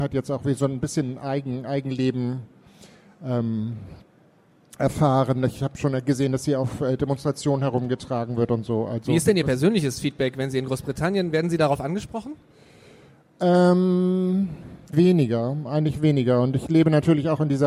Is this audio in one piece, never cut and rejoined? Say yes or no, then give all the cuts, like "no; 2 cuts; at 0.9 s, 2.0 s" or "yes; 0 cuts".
no; 1 cut; at 14.9 s